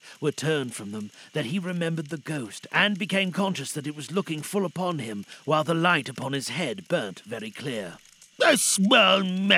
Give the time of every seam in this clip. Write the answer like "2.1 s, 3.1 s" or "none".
8.3 s